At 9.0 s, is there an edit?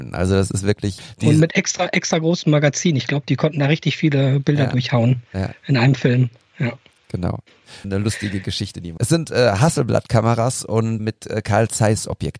yes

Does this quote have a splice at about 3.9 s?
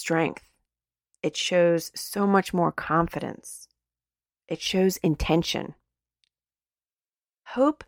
no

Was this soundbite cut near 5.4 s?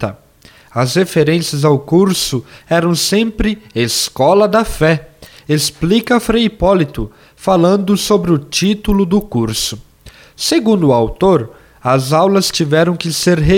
no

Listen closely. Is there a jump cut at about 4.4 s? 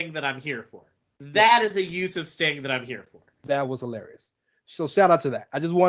no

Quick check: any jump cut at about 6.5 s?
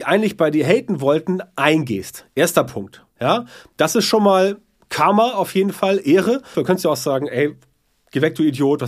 yes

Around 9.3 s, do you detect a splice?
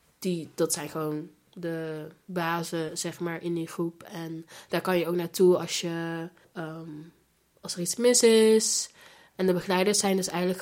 yes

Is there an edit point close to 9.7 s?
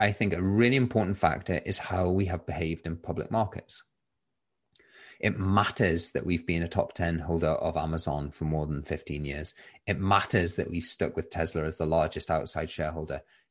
no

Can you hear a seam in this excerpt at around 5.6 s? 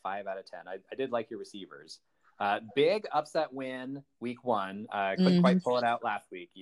no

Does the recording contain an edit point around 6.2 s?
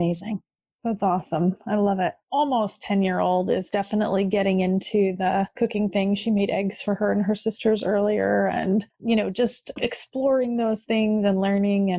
no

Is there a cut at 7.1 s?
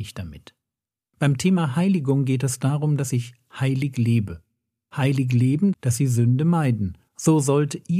yes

